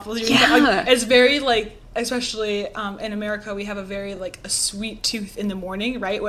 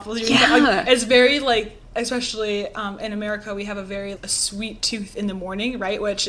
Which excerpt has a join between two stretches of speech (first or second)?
second